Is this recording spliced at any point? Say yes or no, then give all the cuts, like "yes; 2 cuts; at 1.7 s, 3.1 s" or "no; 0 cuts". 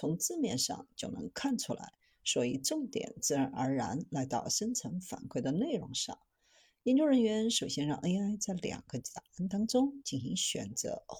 no; 0 cuts